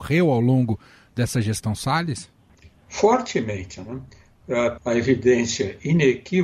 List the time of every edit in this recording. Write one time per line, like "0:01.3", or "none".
0:04.8